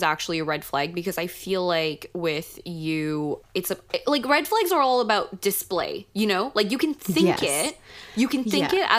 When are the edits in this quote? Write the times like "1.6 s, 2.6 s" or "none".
none